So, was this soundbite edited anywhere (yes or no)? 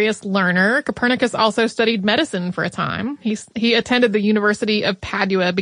no